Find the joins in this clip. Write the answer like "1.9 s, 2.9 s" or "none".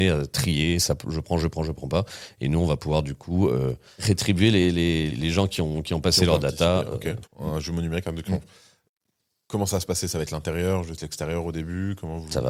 5.1 s, 7.3 s